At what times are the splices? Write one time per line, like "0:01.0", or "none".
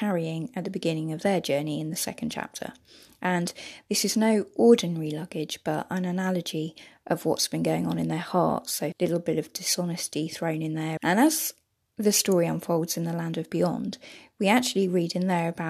0:08.9
0:11.0